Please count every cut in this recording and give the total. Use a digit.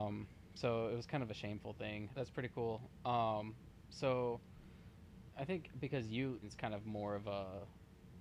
2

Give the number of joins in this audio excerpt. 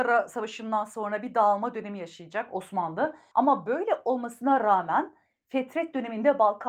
1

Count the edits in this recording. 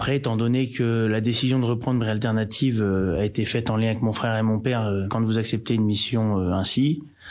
1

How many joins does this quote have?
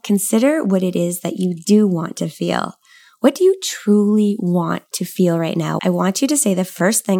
1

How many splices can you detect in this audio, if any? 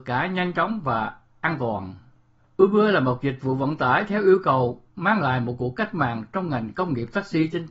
1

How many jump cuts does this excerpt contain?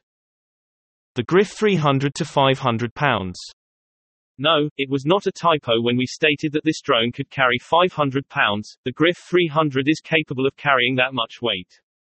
0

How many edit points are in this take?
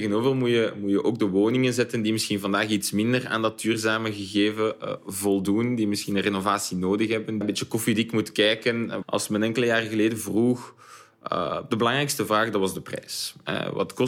2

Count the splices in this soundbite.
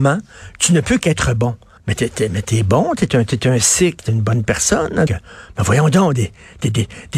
2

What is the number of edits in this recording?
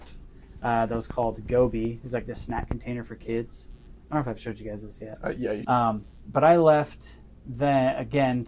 1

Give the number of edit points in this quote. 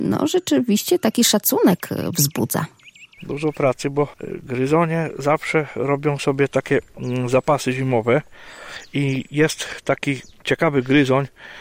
1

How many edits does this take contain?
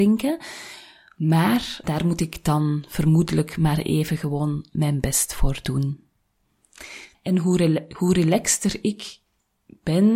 2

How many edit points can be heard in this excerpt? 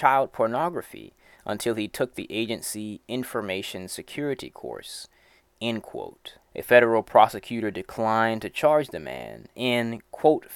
1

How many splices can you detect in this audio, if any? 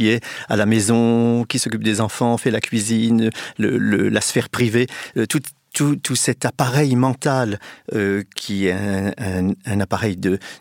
0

